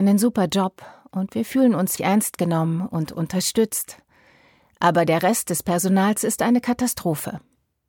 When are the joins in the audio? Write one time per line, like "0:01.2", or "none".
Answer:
0:02.0